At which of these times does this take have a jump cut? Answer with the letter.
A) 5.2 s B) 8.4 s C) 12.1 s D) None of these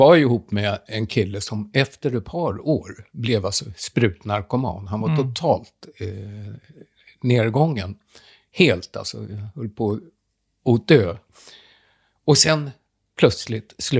D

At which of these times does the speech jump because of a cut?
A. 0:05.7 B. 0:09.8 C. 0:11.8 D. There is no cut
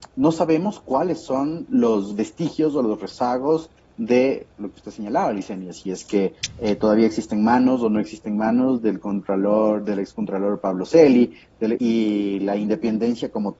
C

